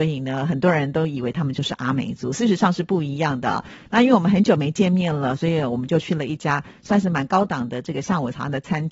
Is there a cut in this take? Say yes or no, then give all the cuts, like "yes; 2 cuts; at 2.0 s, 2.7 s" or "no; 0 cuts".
no; 0 cuts